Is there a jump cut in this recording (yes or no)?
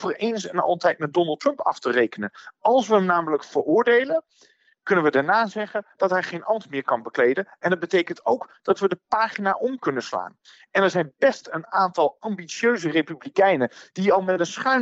no